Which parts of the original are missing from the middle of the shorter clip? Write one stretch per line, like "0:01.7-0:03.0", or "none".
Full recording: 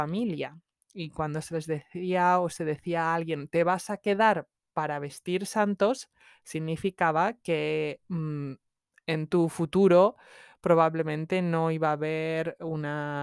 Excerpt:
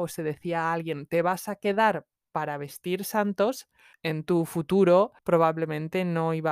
0:06.3-0:09.0
0:10.2-0:10.6